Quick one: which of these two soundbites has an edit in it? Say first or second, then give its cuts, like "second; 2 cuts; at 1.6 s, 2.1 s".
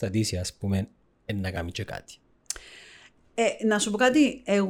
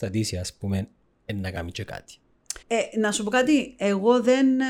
second; 1 cut; at 2.6 s